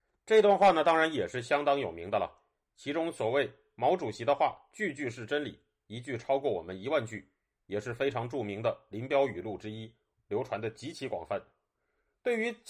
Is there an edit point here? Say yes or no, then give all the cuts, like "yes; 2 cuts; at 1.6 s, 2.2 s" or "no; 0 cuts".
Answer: no; 0 cuts